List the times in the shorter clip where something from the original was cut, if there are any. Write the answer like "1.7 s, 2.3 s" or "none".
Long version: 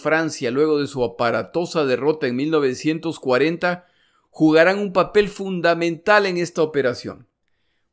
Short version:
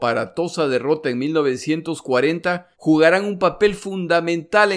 2.7 s